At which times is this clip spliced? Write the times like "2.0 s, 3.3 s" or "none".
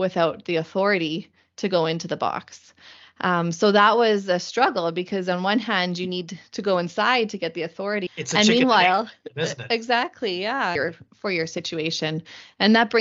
8.1 s, 10.8 s